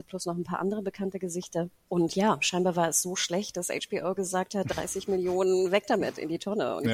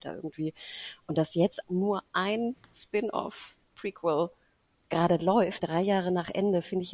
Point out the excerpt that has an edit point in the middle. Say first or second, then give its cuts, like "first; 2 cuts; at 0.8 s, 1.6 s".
second; 2 cuts; at 1.6 s, 5.6 s